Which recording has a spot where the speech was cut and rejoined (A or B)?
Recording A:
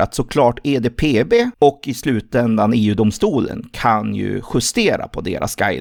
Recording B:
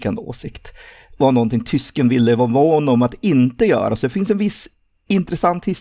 A